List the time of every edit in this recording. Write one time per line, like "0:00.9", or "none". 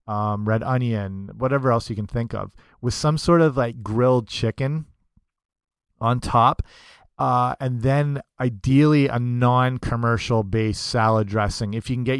none